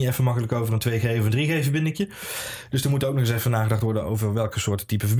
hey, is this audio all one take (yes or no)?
yes